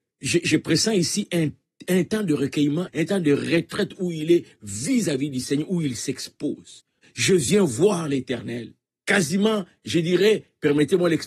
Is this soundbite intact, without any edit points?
no; 2 cuts; at 2.9 s, 7.0 s

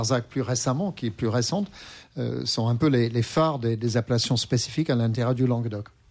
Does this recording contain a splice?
no; 0 cuts

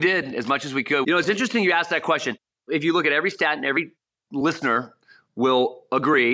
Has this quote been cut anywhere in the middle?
yes; 1 cut; at 1.0 s

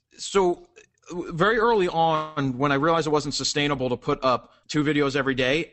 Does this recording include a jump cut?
yes; 1 cut; at 4.6 s

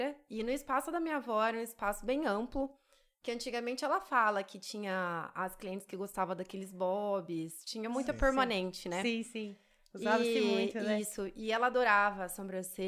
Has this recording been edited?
no; 0 cuts

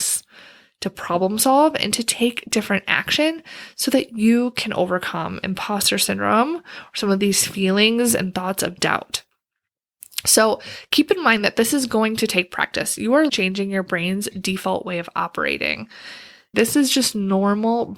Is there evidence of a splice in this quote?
yes; 2 cuts; at 13.3 s, 16.5 s

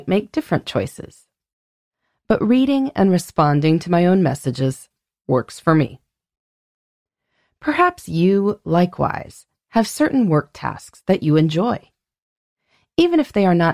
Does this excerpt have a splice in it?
no; 0 cuts

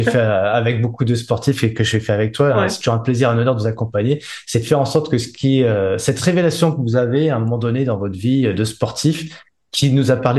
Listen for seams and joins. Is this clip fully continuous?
yes; 0 cuts

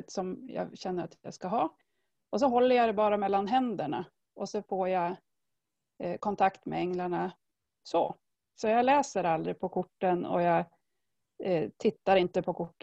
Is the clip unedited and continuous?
yes; 0 cuts

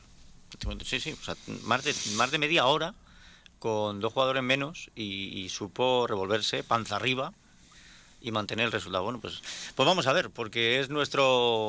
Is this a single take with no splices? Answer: yes; 0 cuts

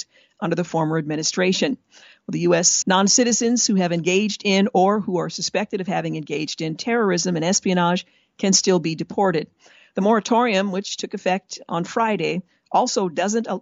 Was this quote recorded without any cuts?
no; 1 cut; at 2.8 s

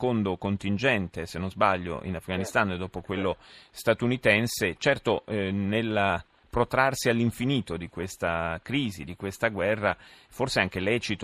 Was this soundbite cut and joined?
no; 0 cuts

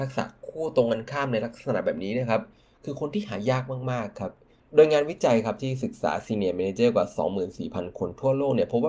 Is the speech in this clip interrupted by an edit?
no; 0 cuts

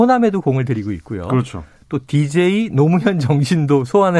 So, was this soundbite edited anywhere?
no; 0 cuts

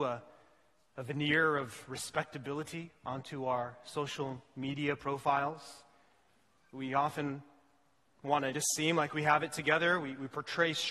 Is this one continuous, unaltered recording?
yes; 0 cuts

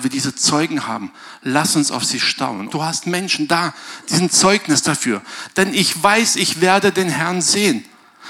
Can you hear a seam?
yes; 2 cuts; at 2.7 s, 5.5 s

